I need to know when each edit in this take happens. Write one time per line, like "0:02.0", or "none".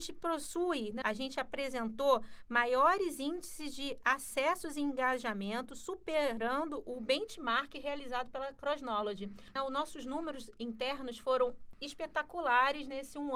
0:01.0
0:09.6